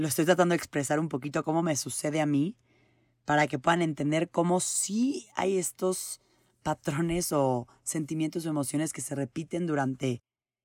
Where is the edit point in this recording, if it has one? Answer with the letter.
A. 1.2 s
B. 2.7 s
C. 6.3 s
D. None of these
D